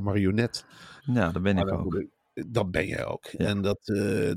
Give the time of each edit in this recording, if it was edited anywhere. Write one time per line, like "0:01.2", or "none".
0:01.0

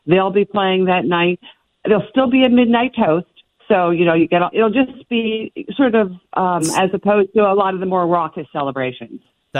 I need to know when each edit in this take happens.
0:04.5
0:06.6

